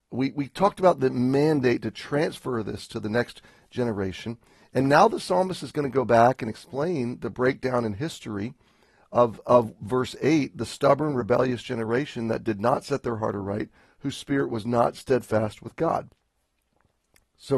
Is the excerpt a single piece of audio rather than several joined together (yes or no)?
yes